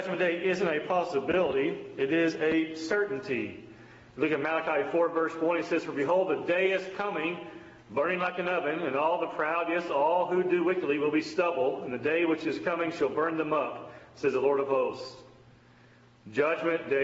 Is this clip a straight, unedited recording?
yes; 0 cuts

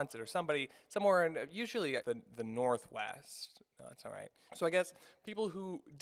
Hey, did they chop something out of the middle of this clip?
yes; 2 cuts; at 2.0 s, 4.5 s

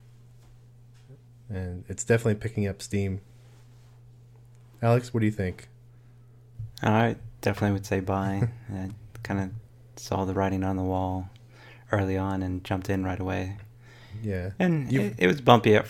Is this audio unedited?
yes; 0 cuts

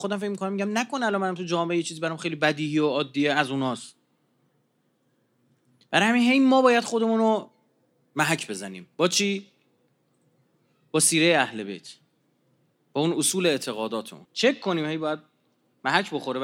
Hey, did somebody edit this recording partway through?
yes; 1 cut; at 14.2 s

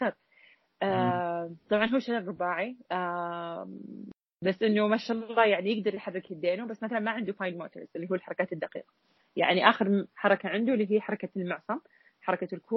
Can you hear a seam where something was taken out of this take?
no; 0 cuts

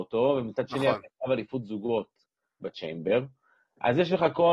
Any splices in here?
yes; 1 cut; at 2.6 s

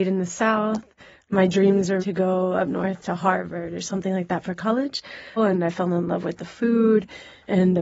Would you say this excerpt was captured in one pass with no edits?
no; 2 cuts; at 2.0 s, 5.4 s

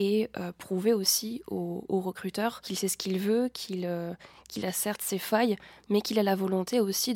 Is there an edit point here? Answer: no; 0 cuts

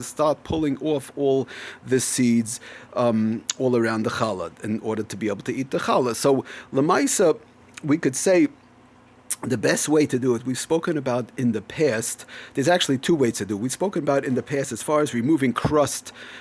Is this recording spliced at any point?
yes; 1 cut; at 11.3 s

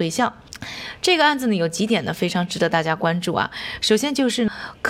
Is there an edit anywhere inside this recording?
no; 0 cuts

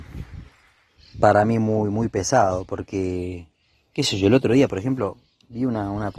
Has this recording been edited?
no; 0 cuts

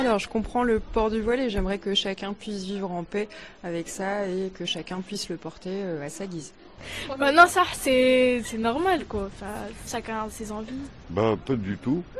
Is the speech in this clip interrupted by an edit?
yes; 1 cut; at 9.9 s

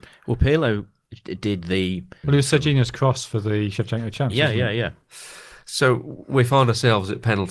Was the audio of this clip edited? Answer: yes; 1 cut; at 2.2 s

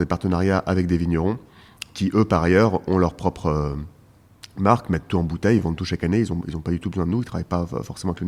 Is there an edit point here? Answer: no; 0 cuts

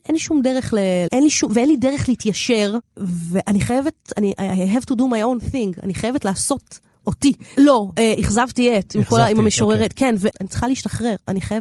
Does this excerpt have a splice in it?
yes; 3 cuts; at 1.1 s, 7.6 s, 10.3 s

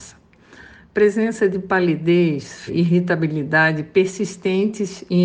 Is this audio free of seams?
no; 1 cut; at 2.7 s

